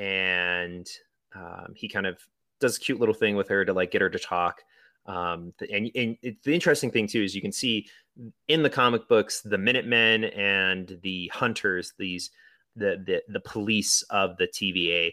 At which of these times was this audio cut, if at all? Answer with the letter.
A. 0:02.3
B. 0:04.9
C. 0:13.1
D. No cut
D